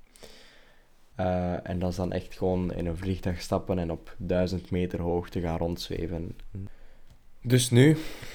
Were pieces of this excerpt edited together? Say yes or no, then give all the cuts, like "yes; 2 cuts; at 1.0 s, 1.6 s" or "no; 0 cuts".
yes; 1 cut; at 1.1 s